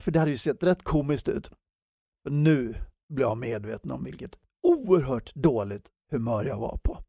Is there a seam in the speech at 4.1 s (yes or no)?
no